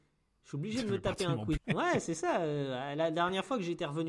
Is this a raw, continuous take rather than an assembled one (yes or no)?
no